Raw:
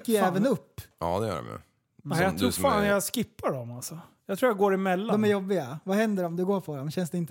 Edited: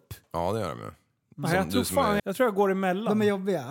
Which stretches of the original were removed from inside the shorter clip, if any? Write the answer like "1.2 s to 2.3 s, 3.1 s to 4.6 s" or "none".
2.9 s to 4.2 s